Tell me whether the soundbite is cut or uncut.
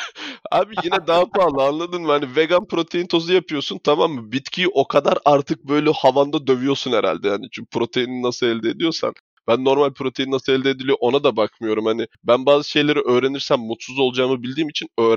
uncut